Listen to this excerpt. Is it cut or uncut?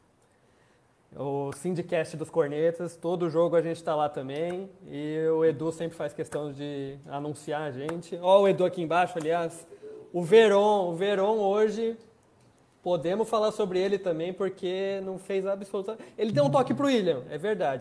uncut